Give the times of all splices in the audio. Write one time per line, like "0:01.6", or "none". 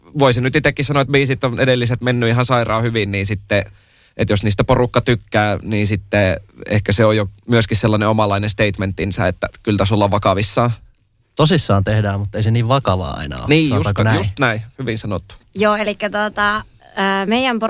none